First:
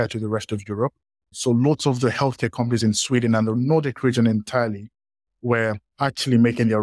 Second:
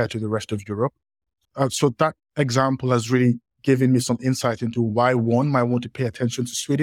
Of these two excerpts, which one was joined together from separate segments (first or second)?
first